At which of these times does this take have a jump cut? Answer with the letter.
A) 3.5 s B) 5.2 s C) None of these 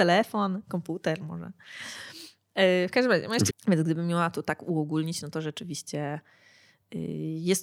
A